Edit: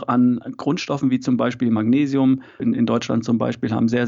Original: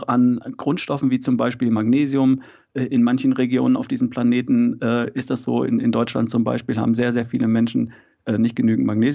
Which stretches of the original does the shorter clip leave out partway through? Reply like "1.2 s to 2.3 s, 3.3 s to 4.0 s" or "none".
2.6 s to 5.7 s